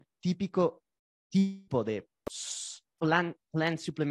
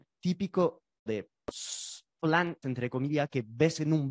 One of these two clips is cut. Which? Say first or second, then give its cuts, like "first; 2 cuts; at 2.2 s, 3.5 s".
second; 2 cuts; at 1.1 s, 2.6 s